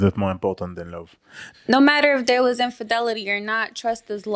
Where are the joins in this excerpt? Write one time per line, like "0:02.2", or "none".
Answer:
0:01.5